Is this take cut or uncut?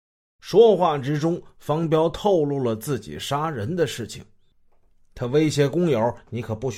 uncut